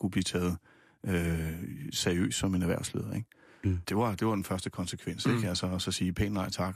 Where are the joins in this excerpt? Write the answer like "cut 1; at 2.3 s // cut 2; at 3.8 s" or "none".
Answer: cut 1; at 3.8 s